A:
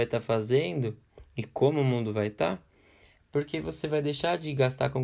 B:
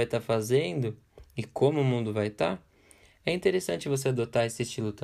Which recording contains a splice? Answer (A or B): A